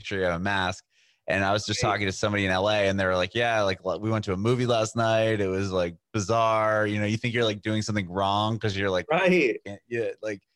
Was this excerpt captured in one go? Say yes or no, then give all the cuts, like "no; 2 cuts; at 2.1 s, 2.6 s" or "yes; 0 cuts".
yes; 0 cuts